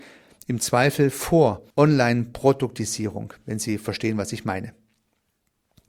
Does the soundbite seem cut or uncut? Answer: cut